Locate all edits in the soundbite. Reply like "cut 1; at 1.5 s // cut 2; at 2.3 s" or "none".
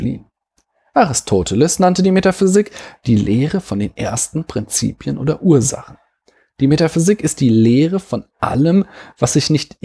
none